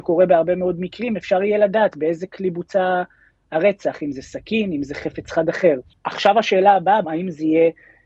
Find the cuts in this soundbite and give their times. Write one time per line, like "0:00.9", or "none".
0:05.9
0:07.0